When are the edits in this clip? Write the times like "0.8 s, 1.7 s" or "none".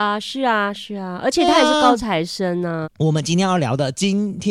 2.8 s

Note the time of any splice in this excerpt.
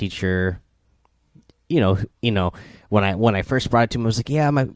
2.2 s

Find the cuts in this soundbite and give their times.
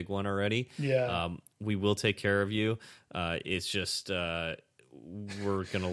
none

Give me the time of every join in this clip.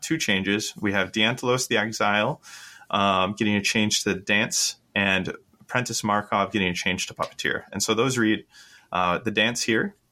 none

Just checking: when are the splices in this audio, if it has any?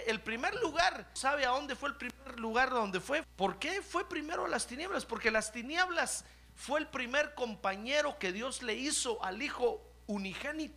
1.2 s, 3.2 s

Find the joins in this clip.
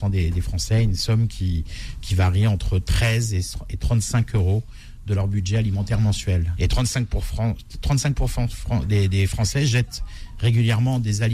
6.5 s

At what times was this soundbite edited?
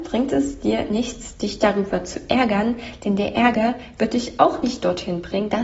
none

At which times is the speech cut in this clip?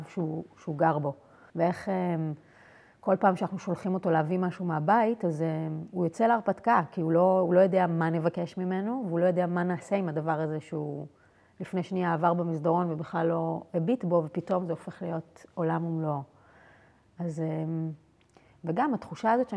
1.5 s

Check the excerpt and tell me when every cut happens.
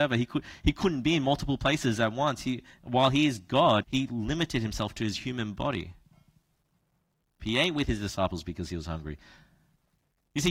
3.8 s, 7.4 s

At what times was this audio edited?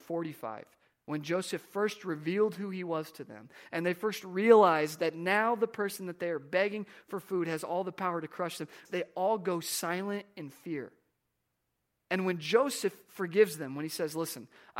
8.8 s

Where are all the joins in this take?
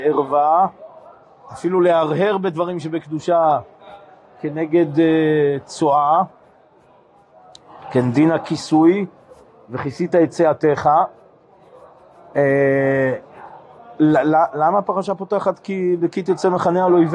none

